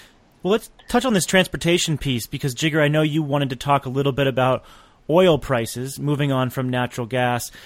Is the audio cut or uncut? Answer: uncut